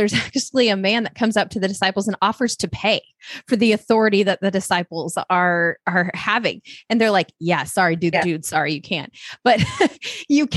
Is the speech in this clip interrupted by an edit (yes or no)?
yes